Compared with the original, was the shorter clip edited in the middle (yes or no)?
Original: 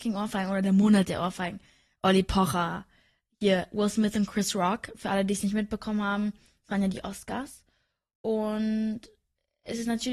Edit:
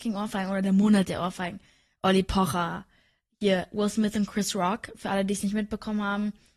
no